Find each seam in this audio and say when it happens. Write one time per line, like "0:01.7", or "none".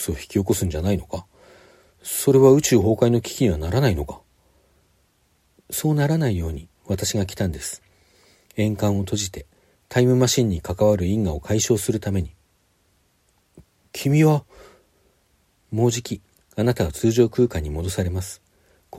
none